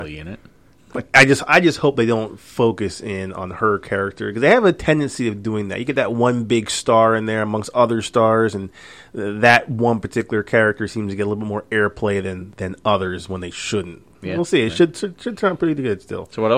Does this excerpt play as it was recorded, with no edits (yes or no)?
no